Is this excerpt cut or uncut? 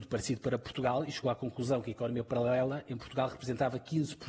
uncut